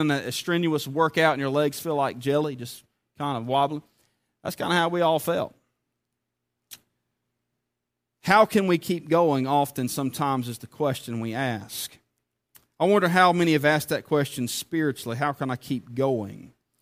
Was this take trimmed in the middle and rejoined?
no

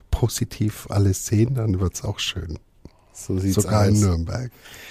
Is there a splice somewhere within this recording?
no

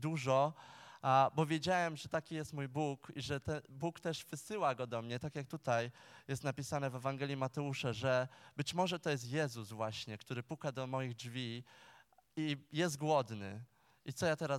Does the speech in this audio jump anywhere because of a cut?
no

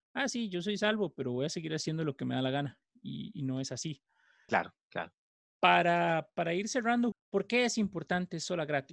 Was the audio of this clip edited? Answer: yes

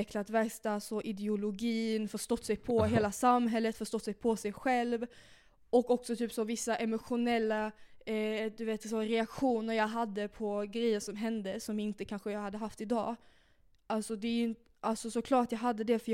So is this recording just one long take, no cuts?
yes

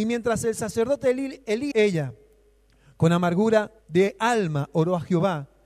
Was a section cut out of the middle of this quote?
yes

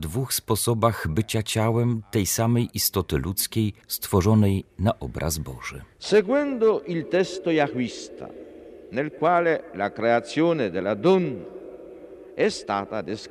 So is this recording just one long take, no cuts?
no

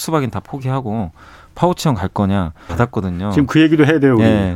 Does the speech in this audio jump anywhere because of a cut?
yes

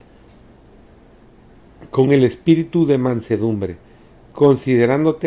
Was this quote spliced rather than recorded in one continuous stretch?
no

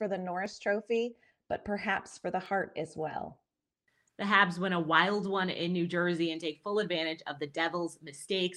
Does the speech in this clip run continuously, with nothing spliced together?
yes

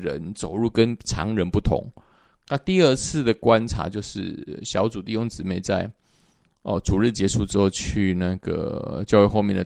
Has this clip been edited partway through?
no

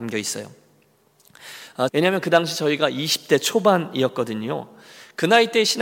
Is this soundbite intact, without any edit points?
no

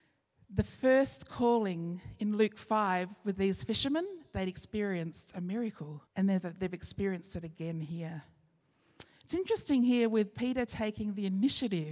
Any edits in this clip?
yes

